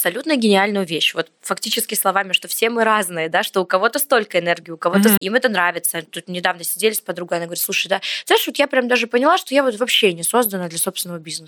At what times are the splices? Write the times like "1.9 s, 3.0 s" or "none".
5.2 s